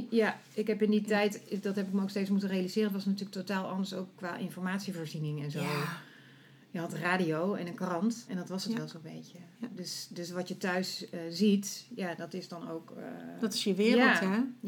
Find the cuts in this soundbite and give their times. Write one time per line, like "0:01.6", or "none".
0:08.3